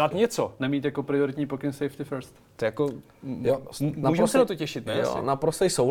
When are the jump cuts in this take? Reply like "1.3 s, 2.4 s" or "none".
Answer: 2.4 s